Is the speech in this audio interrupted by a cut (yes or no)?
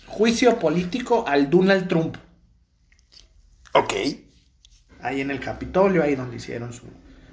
yes